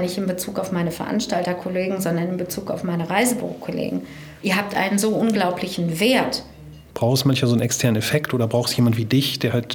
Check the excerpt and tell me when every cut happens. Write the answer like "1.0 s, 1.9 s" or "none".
4.4 s, 6.9 s